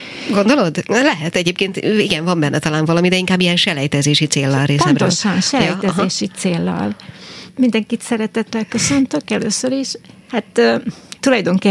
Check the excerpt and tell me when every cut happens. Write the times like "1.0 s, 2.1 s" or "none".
7.5 s